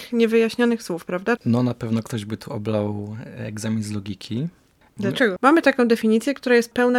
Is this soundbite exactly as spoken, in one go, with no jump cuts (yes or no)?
no